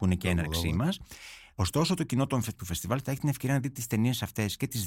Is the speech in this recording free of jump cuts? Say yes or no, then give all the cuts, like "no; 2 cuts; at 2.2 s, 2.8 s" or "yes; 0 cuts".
no; 2 cuts; at 1.5 s, 2.6 s